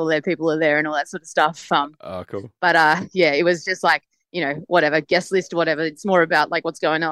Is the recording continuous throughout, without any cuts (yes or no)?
yes